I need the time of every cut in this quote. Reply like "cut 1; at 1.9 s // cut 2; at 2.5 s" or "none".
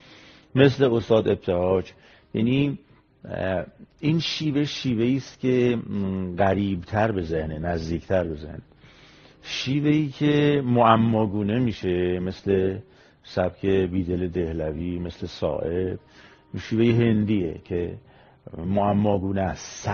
none